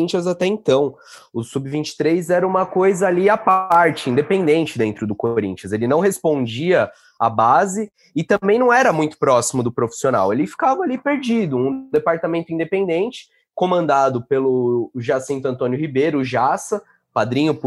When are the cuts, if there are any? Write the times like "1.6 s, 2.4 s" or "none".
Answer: none